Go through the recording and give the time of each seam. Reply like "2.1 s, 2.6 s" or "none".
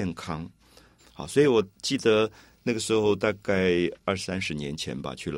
1.0 s